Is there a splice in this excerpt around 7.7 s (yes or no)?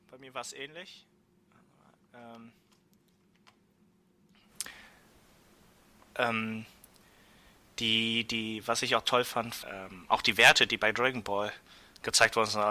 no